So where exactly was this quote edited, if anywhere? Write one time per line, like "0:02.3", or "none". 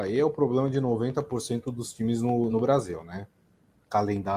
none